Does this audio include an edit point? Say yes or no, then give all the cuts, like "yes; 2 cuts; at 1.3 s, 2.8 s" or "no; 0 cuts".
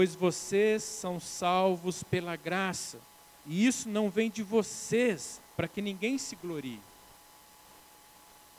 yes; 2 cuts; at 3.4 s, 5.5 s